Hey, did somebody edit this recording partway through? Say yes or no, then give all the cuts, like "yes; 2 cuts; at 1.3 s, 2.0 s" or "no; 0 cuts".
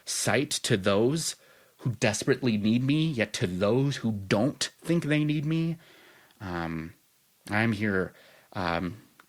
no; 0 cuts